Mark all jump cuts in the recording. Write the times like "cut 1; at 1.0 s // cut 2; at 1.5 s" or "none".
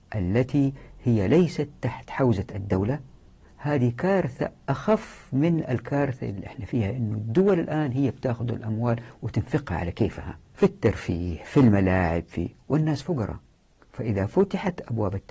cut 1; at 10.4 s